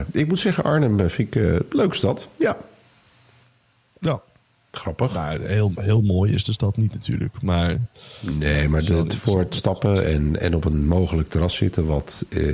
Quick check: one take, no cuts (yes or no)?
yes